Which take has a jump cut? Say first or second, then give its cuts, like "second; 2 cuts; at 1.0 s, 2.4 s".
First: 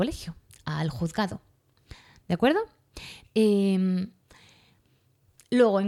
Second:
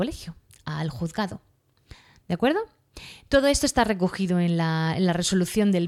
first; 1 cut; at 3.2 s